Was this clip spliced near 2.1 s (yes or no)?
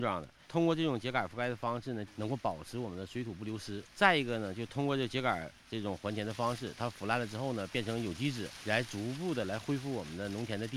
yes